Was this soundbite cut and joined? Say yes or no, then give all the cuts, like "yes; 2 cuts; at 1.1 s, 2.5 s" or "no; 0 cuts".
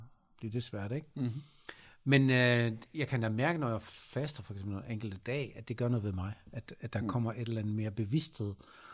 no; 0 cuts